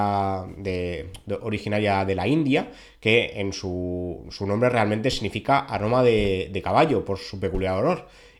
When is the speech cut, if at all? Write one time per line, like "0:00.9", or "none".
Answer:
none